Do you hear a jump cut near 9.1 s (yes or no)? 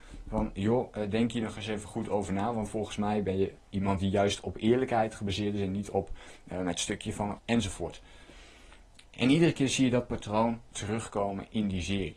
no